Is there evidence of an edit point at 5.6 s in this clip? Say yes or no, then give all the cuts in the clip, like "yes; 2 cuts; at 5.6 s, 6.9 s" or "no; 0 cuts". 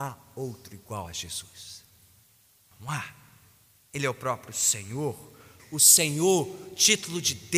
yes; 1 cut; at 5.6 s